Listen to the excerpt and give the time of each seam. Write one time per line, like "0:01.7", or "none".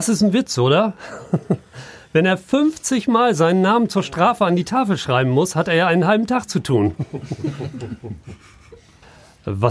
none